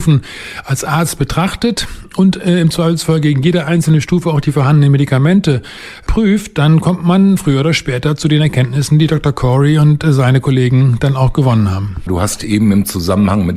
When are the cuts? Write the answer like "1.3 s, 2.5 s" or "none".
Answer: 12.1 s